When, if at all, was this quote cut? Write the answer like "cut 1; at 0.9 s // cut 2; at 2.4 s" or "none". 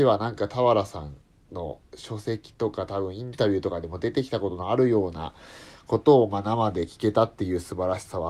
none